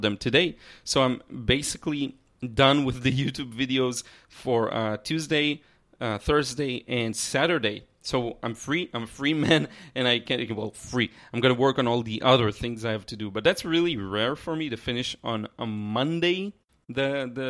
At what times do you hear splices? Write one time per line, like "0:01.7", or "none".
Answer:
none